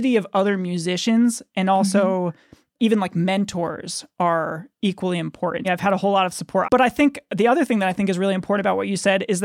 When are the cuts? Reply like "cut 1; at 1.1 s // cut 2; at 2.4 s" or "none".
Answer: cut 1; at 5.6 s // cut 2; at 6.6 s